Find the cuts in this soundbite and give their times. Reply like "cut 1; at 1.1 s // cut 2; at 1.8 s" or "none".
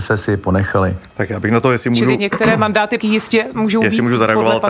cut 1; at 3.0 s

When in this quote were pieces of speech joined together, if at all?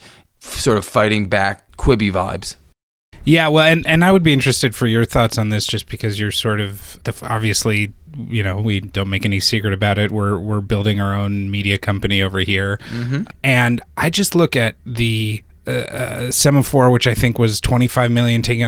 cut 1; at 13.3 s

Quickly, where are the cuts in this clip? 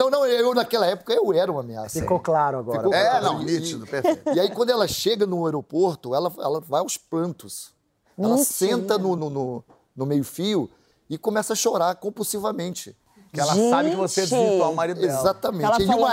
cut 1; at 9.2 s

